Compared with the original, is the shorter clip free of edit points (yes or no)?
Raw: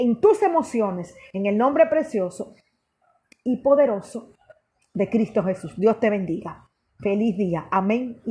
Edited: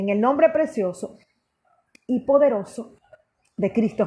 yes